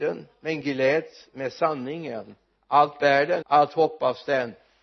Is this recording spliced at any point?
yes; 1 cut; at 3.4 s

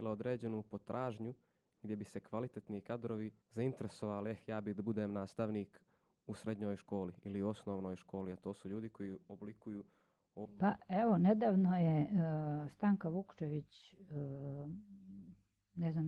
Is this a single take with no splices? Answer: no; 1 cut; at 3.4 s

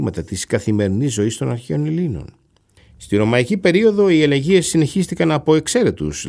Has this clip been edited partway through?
yes; 1 cut; at 2.8 s

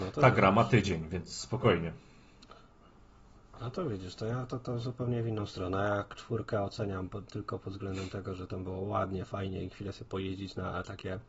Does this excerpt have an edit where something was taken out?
no; 0 cuts

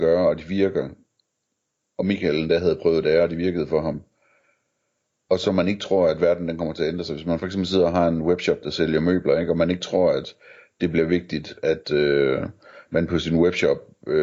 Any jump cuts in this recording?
no; 0 cuts

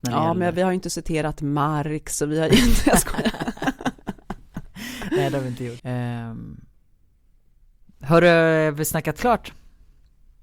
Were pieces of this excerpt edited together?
yes; 1 cut; at 5.8 s

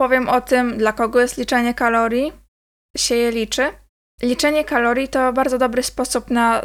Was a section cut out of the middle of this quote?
yes; 1 cut; at 2.9 s

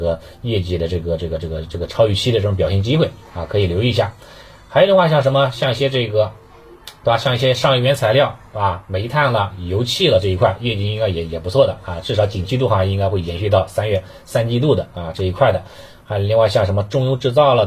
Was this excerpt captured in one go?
yes; 0 cuts

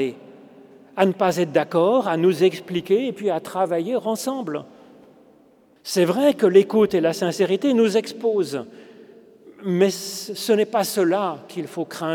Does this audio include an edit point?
yes; 1 cut; at 5.8 s

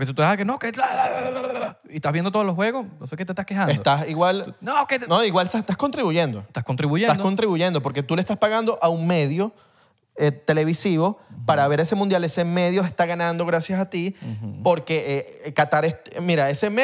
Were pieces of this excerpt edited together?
no; 0 cuts

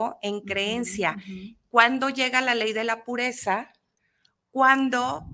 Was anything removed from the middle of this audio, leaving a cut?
no; 0 cuts

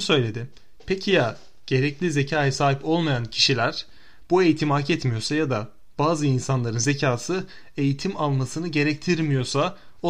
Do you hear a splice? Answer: no; 0 cuts

